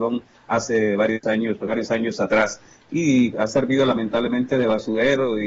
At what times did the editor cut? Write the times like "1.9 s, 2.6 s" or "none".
1.7 s, 3.3 s